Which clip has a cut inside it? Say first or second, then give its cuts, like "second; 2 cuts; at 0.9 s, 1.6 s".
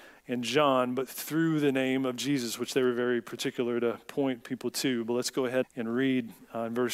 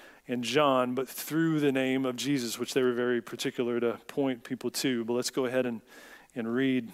first; 1 cut; at 5.6 s